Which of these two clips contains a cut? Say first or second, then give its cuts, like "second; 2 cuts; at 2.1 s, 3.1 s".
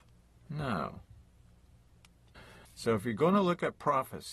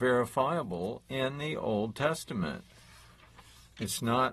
first; 1 cut; at 2.7 s